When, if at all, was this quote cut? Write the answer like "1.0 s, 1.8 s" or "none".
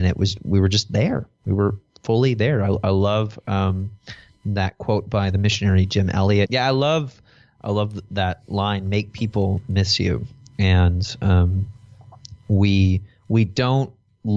6.5 s